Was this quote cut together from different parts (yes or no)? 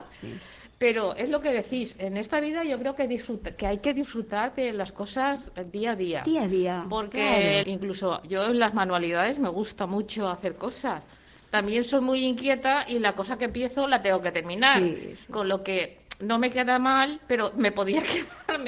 yes